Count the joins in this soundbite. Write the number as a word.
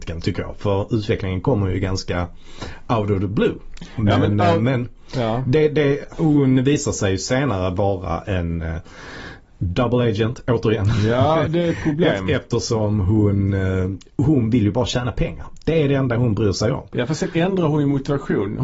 one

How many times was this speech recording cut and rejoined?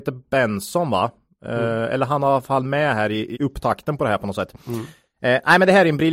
one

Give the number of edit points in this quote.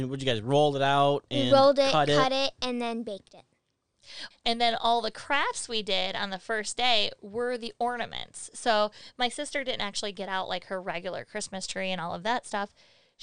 one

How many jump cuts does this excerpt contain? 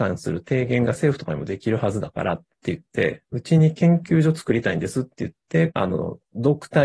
one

